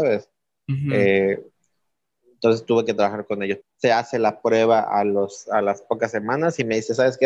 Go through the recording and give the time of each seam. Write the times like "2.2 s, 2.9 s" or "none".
3.6 s